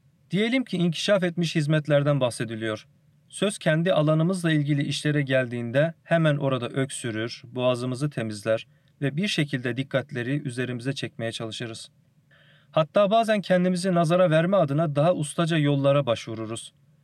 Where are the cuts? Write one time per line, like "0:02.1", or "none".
none